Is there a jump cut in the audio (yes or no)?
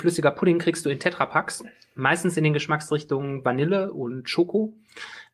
no